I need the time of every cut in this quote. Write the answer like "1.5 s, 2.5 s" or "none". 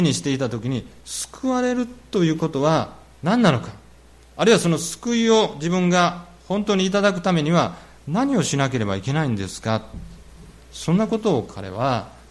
none